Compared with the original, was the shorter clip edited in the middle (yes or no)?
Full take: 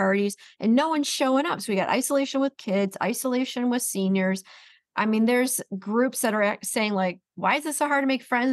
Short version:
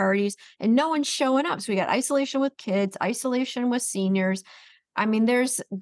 no